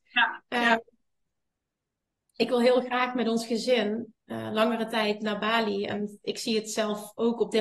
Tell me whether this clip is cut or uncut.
uncut